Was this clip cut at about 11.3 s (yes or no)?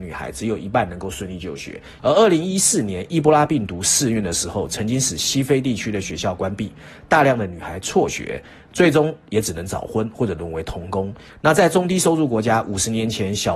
yes